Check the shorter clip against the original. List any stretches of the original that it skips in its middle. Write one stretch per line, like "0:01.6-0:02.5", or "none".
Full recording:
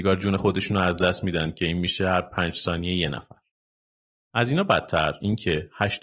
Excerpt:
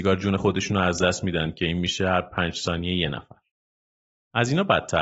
none